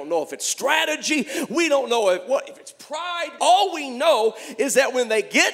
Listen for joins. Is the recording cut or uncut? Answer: cut